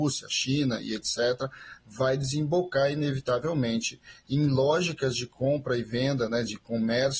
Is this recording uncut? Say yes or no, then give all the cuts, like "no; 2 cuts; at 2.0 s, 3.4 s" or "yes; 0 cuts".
yes; 0 cuts